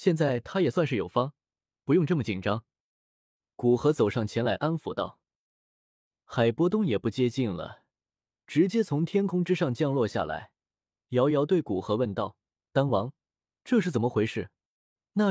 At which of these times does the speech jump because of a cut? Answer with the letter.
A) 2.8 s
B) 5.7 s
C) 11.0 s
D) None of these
B